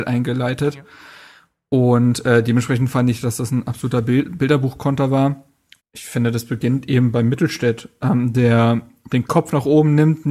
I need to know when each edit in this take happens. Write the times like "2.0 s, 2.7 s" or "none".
5.8 s